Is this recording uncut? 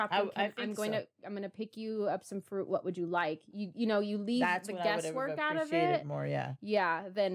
yes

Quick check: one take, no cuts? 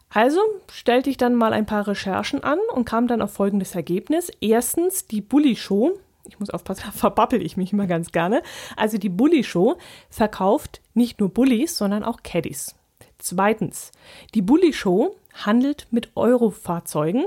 no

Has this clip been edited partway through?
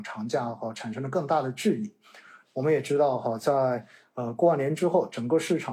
yes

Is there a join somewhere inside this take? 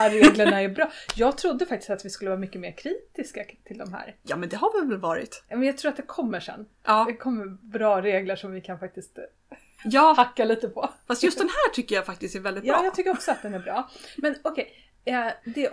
no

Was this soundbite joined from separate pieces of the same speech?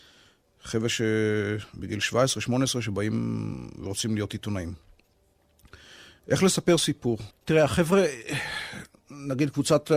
yes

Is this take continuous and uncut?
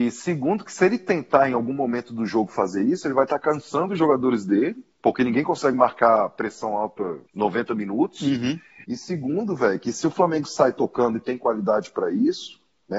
no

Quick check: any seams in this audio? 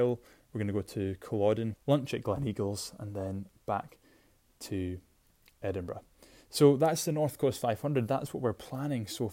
yes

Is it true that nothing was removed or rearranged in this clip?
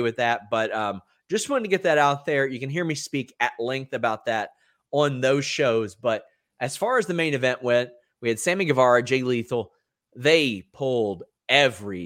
yes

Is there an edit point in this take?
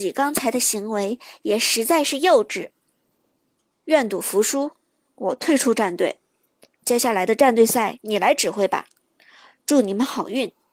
no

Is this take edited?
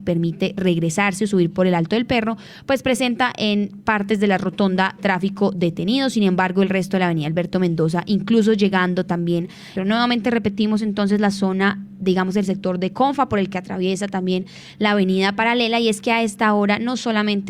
yes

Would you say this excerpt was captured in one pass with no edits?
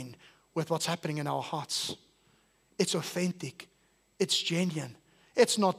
yes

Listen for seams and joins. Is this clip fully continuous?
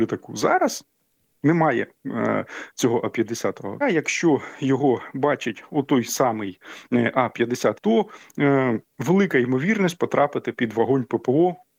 no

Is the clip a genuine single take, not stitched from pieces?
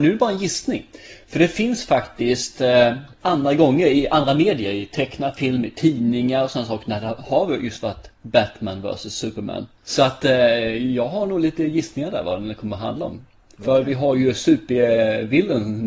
yes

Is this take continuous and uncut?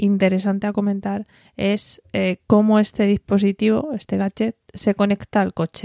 yes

